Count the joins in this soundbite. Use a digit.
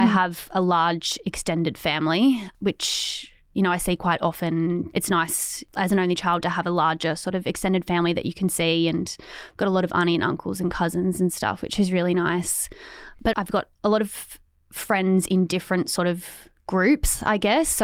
1